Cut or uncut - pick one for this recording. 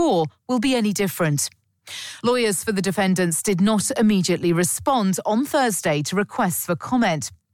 uncut